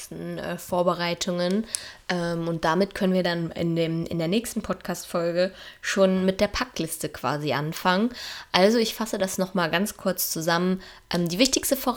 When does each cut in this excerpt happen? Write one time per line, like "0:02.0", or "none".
none